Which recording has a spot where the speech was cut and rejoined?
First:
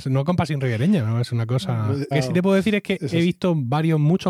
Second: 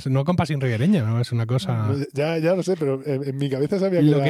first; 1 cut; at 2.1 s

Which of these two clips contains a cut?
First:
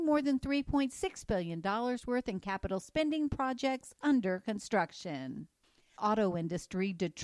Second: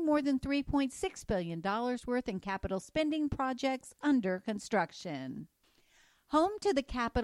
first; 1 cut; at 6.0 s

